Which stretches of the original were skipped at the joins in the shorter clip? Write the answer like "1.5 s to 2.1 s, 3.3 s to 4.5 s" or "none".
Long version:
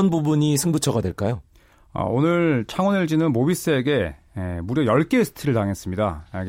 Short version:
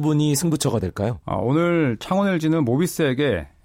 1.4 s to 1.9 s

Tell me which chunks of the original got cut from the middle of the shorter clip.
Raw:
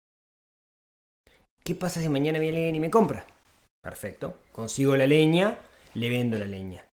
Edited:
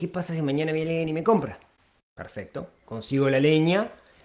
none

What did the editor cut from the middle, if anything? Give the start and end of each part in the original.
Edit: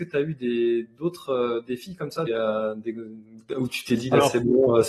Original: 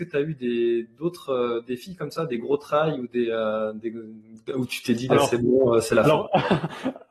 2.3 s to 3.2 s

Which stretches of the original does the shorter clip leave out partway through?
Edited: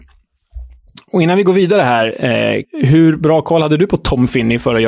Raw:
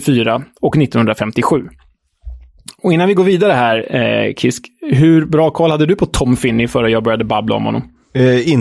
4.3 s to 4.7 s

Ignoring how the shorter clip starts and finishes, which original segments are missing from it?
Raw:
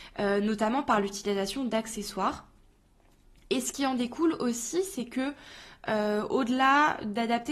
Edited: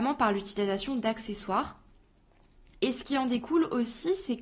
none

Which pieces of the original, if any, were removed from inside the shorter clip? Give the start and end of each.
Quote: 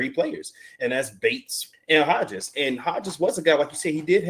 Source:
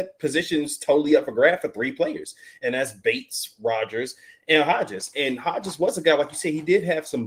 3.6 s to 4.3 s

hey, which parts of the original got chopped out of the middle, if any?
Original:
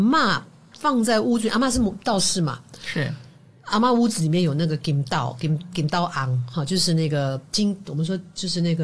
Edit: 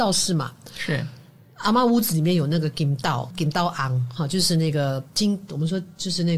5.4 s to 5.7 s

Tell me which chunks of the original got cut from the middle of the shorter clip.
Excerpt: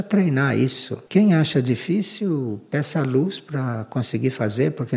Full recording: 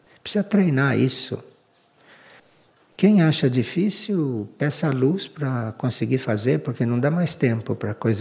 1.5 s to 2.9 s

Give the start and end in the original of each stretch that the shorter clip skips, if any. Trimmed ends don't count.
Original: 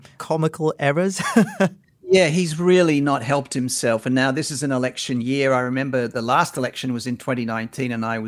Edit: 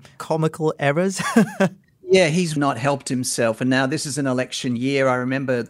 2.6 s to 3.0 s

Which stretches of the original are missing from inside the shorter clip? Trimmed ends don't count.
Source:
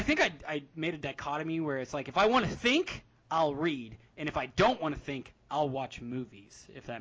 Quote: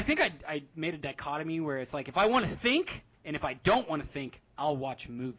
3.1 s to 4.1 s

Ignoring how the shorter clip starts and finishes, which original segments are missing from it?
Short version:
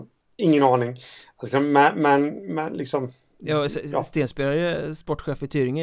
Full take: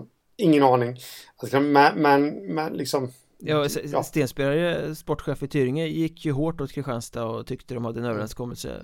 none

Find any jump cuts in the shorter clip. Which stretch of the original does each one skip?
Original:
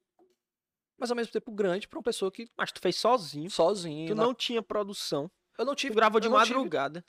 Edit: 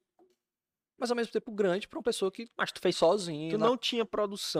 2.9 s to 3.5 s

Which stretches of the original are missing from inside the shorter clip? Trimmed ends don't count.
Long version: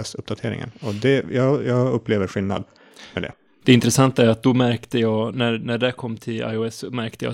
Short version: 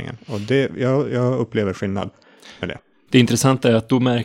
none

